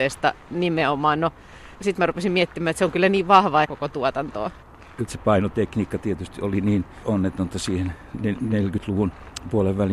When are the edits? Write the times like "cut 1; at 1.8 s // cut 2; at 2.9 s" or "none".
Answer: cut 1; at 3.6 s // cut 2; at 5.1 s